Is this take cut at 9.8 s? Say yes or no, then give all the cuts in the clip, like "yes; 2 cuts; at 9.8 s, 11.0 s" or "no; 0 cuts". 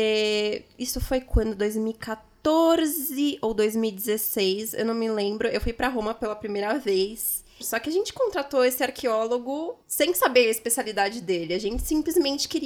yes; 2 cuts; at 7.6 s, 9.8 s